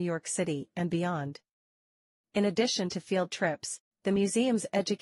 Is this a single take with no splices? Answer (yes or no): no